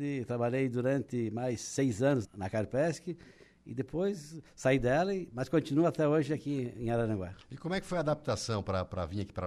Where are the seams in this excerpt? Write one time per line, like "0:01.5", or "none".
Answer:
0:02.2